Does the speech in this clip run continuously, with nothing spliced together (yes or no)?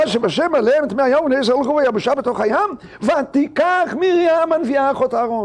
yes